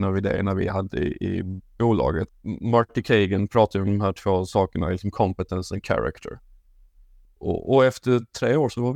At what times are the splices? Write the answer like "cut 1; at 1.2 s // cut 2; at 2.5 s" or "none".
cut 1; at 2.3 s // cut 2; at 7.2 s